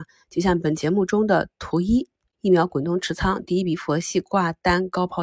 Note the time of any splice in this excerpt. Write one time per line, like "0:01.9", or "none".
0:02.3